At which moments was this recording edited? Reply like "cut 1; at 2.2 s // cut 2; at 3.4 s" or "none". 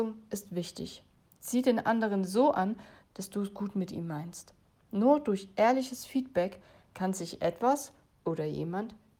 cut 1; at 3.0 s